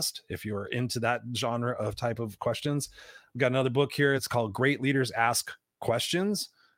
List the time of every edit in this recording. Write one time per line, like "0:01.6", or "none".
none

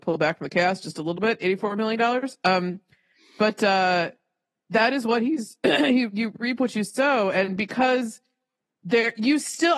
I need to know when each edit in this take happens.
none

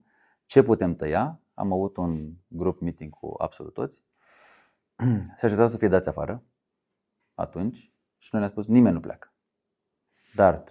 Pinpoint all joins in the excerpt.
none

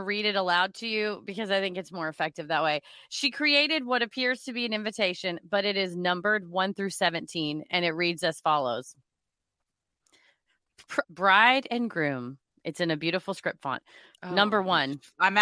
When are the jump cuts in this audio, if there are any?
0:11.0
0:14.1

